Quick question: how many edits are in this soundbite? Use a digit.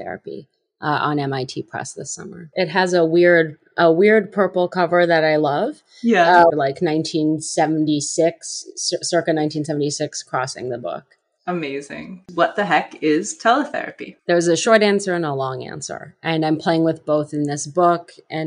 1